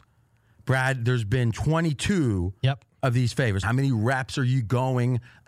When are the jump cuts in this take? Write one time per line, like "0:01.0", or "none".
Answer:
0:03.6